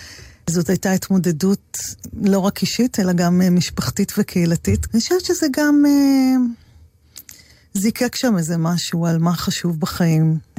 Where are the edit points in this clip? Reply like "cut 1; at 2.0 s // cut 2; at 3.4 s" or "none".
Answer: cut 1; at 4.9 s